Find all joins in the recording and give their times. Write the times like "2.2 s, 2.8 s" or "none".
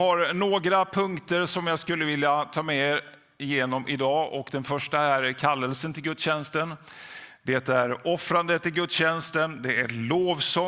none